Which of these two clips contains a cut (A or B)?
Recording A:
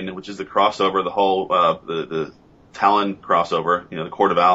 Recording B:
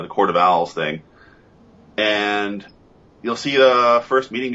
A